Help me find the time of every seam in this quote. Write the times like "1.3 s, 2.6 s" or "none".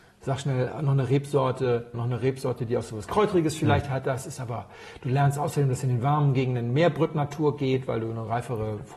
1.9 s